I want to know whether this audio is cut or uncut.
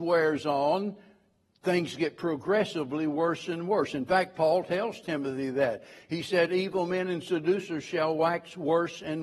uncut